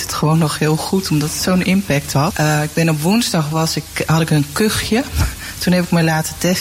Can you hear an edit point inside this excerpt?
yes; 1 cut; at 2.3 s

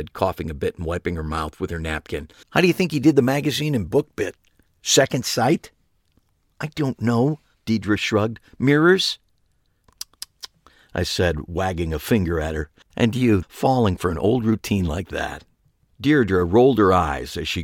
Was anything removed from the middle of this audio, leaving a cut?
yes; 2 cuts; at 2.4 s, 13.4 s

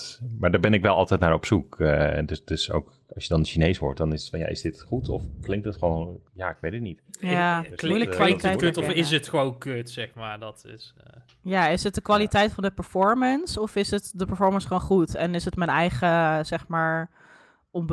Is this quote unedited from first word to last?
yes; 0 cuts

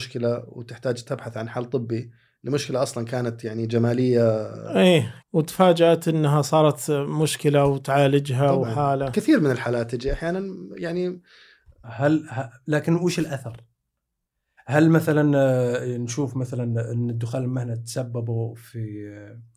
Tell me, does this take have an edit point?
yes; 2 cuts; at 5.2 s, 11.8 s

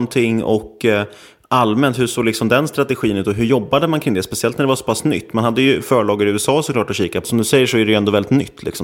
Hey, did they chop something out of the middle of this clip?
yes; 1 cut; at 7.2 s

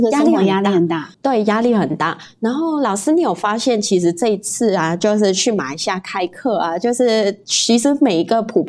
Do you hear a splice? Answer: yes; 1 cut; at 1.1 s

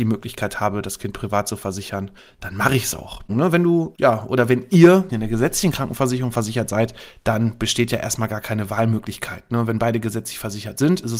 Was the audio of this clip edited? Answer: yes; 2 cuts; at 3.3 s, 5.1 s

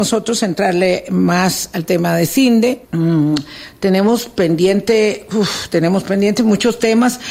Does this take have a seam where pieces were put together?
yes; 1 cut; at 2.8 s

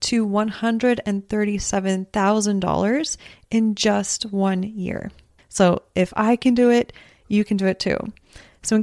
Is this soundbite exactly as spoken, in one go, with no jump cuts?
yes; 0 cuts

